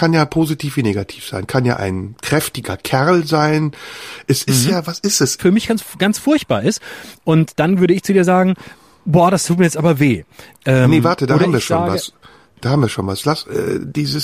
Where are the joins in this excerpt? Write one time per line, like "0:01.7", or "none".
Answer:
0:05.4